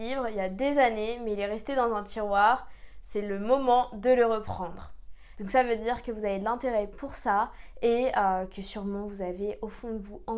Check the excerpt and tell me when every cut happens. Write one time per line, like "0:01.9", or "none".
0:05.4

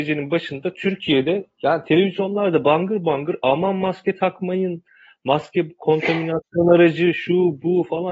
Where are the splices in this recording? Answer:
none

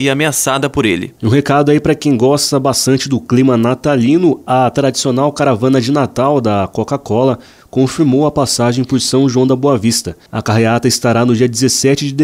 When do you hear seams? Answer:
0:01.2

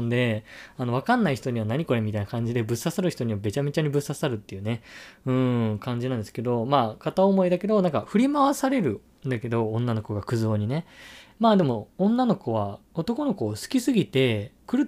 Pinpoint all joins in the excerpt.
none

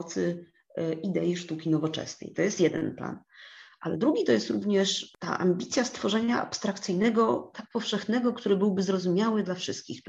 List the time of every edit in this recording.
0:02.3
0:07.5

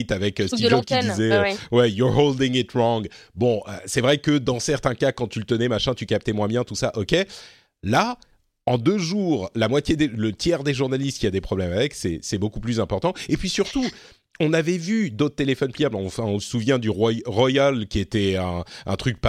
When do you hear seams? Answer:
none

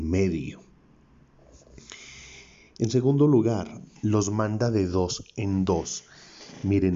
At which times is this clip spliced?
none

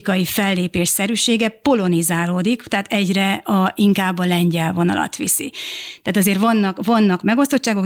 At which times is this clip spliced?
none

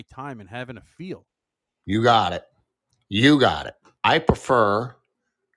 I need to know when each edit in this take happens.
0:04.0

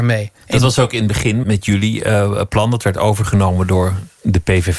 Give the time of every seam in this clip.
0:01.4

